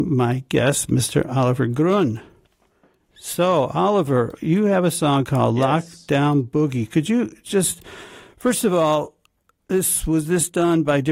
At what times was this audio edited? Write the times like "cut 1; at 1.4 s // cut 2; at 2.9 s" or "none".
none